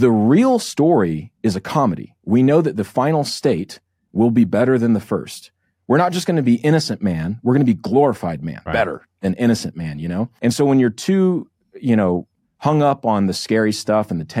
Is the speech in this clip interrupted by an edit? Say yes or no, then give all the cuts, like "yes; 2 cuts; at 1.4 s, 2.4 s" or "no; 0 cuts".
yes; 2 cuts; at 8.7 s, 10.4 s